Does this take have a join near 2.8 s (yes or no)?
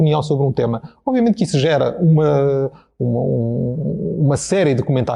no